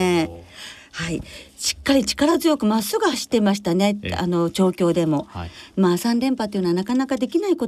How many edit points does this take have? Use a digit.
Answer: 0